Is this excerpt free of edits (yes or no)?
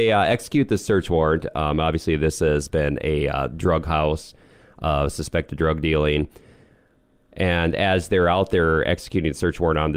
yes